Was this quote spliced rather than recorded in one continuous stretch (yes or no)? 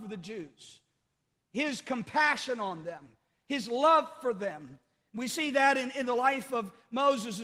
no